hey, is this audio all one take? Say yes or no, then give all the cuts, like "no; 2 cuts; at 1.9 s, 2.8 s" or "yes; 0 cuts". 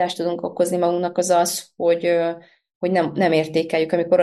yes; 0 cuts